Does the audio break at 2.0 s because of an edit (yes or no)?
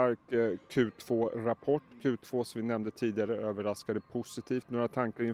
no